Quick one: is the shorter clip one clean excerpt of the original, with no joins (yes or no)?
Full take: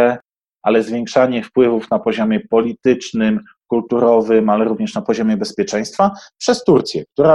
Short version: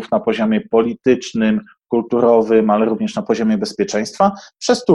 yes